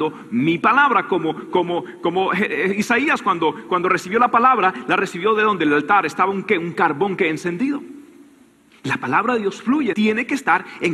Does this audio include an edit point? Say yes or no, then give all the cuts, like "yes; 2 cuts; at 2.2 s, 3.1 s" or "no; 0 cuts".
yes; 1 cut; at 9.9 s